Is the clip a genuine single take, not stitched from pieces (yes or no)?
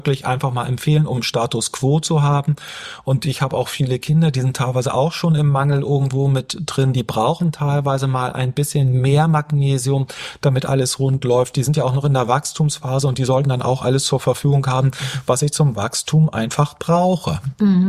yes